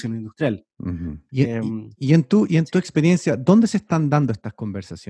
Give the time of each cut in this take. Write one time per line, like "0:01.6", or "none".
0:01.3